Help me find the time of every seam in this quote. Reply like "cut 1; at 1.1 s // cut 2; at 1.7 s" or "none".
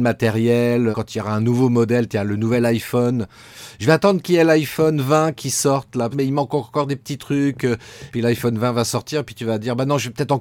cut 1; at 0.9 s // cut 2; at 6.1 s // cut 3; at 8.1 s